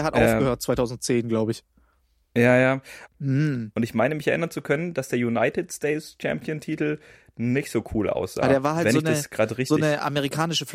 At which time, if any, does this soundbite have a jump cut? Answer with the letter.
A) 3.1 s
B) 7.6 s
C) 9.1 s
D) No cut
A